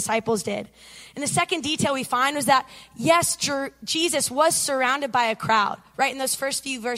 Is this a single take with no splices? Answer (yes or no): yes